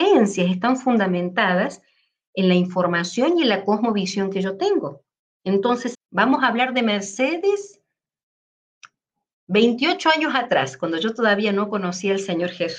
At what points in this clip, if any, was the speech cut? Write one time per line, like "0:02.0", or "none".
0:05.9

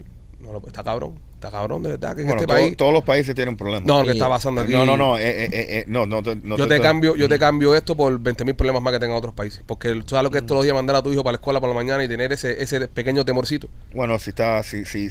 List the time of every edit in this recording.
0:04.0

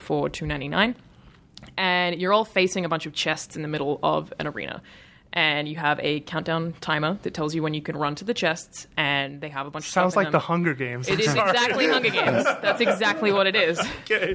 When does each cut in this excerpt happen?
none

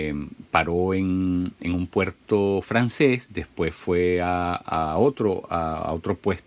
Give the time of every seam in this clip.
none

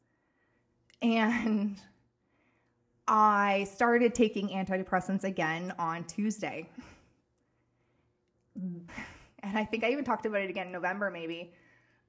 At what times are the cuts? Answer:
0:08.9

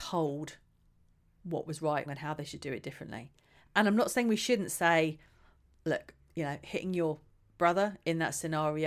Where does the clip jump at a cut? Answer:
0:02.1

